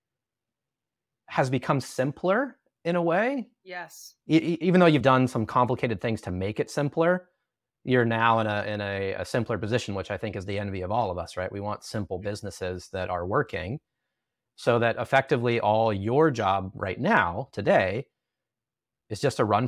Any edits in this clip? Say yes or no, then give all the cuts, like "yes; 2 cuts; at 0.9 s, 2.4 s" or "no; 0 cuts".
yes; 1 cut; at 5.0 s